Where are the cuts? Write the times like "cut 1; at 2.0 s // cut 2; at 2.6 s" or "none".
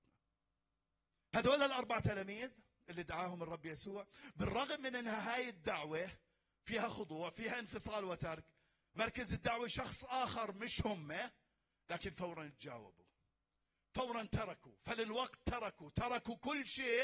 none